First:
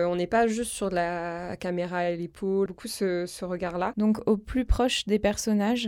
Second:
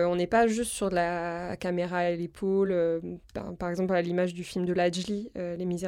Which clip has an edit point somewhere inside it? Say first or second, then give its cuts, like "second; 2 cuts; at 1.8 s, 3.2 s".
first; 2 cuts; at 2.7 s, 3.9 s